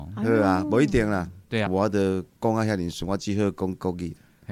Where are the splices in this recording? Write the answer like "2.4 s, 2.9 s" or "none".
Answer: 1.7 s